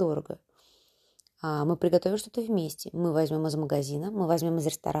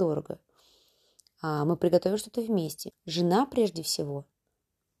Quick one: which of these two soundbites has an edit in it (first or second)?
second